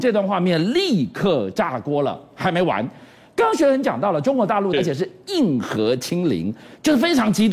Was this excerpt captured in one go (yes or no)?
no